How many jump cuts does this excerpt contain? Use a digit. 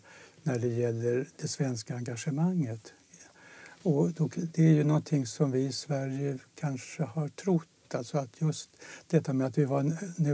0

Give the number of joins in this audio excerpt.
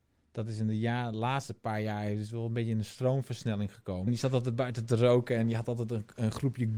1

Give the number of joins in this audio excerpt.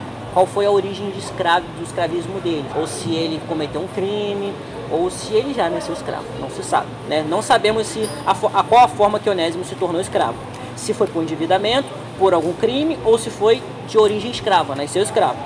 1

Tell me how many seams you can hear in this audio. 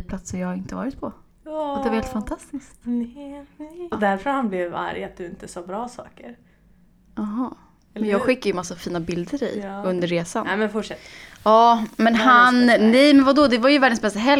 1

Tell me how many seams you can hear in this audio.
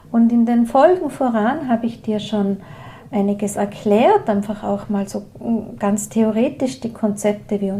0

